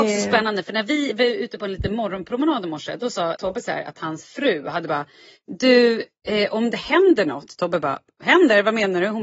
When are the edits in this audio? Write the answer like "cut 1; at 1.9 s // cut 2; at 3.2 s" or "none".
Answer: cut 1; at 3.4 s